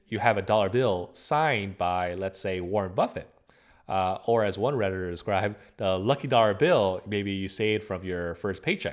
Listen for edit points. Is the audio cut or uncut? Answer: uncut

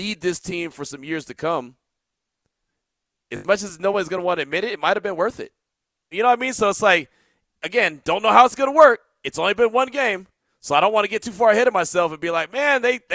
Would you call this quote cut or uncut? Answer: cut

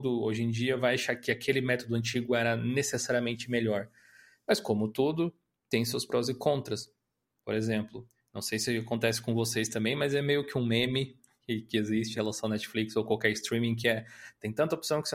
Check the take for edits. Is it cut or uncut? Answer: cut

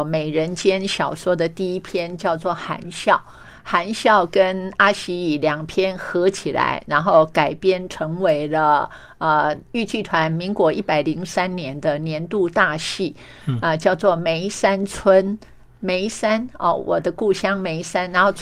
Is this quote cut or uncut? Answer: cut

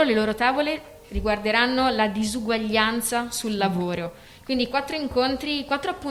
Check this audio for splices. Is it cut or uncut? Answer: uncut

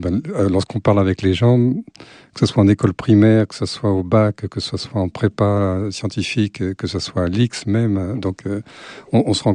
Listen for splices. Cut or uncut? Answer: uncut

